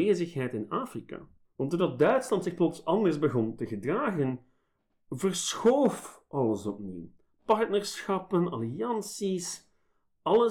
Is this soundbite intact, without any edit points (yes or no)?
no